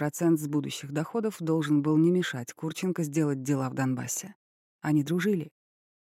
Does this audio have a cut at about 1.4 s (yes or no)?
no